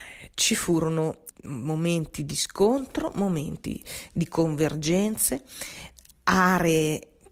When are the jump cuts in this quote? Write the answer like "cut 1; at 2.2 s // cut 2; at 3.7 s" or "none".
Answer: cut 1; at 1.3 s